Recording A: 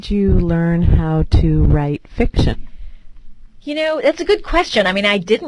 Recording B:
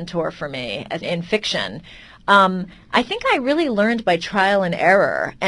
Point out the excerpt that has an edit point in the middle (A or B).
B